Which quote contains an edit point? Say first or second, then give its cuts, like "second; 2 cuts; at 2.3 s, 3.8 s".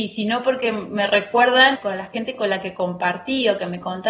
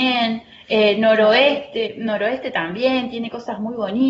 first; 1 cut; at 1.7 s